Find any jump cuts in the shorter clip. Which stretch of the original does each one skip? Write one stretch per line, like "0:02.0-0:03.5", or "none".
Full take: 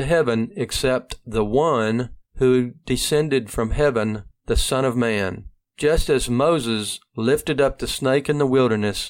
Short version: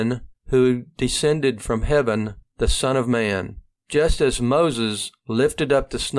none